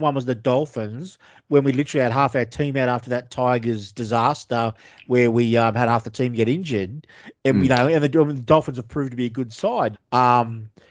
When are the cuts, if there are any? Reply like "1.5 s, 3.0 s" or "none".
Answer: 9.9 s

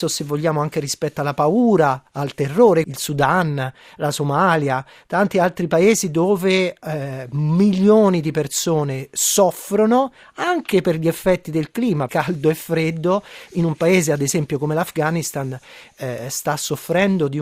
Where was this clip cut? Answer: 2.8 s, 12.1 s

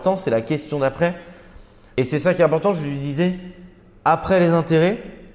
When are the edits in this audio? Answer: none

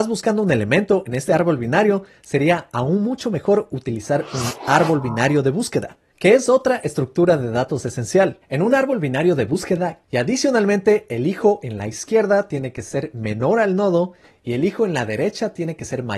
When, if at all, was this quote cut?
10.0 s

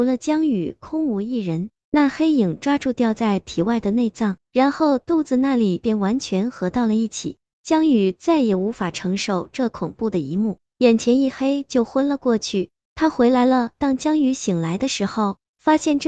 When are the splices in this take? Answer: 1.8 s, 4.4 s

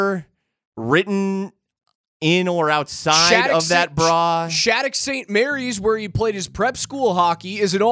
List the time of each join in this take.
none

